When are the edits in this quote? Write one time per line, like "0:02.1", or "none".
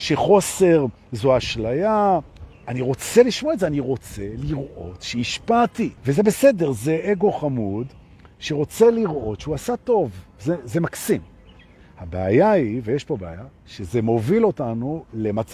0:06.0